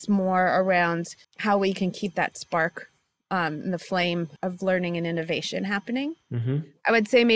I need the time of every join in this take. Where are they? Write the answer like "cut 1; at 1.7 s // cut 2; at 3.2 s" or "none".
cut 1; at 1.2 s // cut 2; at 4.4 s